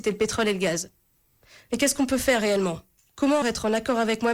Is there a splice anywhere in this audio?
yes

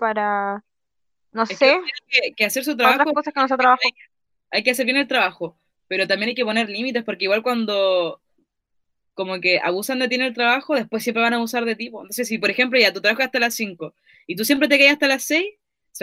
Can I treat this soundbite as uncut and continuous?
yes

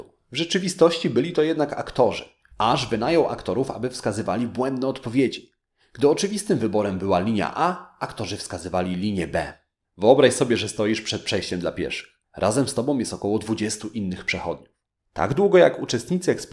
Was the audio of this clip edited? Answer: yes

